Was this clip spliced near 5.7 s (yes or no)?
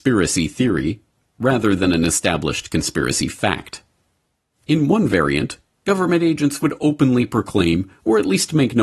no